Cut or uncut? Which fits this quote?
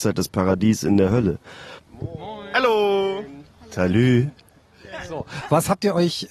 cut